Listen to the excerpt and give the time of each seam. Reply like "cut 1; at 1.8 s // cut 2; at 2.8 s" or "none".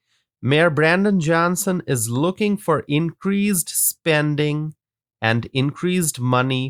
none